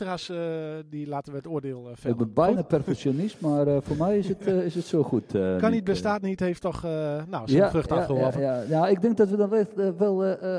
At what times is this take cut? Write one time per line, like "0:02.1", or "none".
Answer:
none